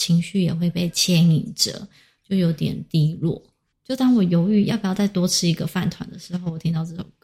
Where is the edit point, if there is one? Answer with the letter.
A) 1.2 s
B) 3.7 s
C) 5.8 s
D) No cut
B